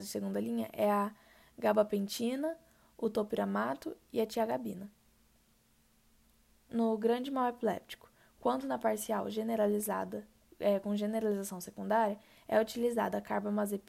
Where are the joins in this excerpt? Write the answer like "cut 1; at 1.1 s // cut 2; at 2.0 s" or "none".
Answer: cut 1; at 6.7 s // cut 2; at 8.3 s

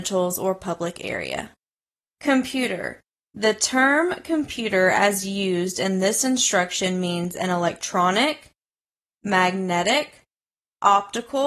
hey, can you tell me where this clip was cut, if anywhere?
none

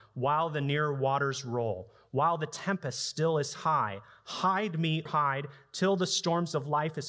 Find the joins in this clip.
cut 1; at 5.1 s

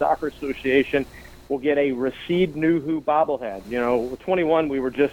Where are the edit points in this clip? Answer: cut 1; at 3.6 s

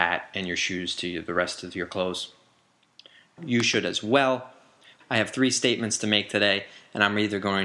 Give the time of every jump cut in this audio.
cut 1; at 3.4 s // cut 2; at 5.0 s

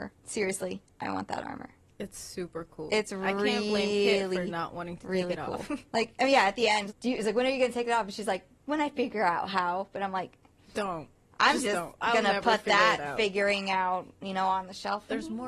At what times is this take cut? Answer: cut 1; at 6.9 s

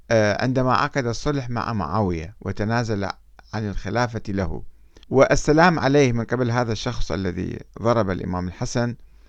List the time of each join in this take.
cut 1; at 5.0 s

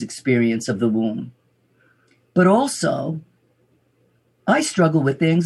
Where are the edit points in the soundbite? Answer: none

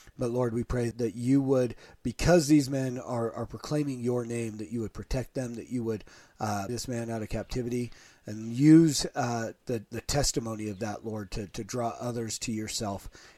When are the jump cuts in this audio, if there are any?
cut 1; at 0.9 s // cut 2; at 6.7 s

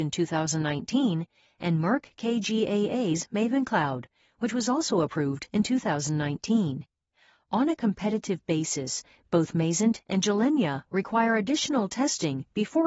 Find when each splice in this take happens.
none

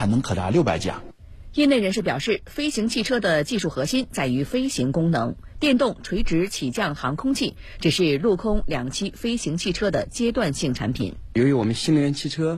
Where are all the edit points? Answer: cut 1; at 11.3 s

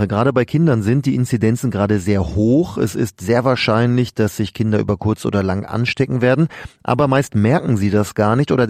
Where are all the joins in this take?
none

